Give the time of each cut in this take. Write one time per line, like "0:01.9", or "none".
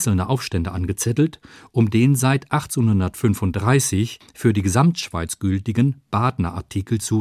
none